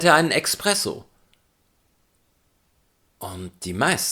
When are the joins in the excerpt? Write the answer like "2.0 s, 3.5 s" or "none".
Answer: none